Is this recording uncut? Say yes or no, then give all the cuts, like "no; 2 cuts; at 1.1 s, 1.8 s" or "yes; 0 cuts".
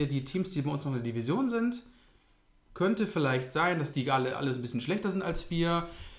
yes; 0 cuts